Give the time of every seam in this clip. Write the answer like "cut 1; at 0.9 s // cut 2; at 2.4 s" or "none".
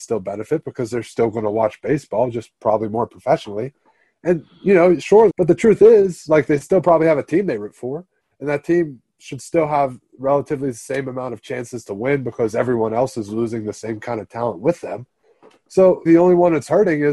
cut 1; at 5.3 s // cut 2; at 16.1 s